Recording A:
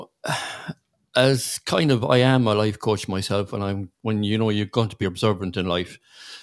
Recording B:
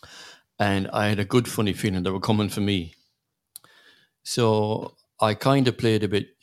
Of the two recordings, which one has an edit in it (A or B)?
A